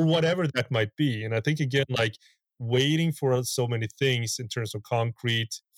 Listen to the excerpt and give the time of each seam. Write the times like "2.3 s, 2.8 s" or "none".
none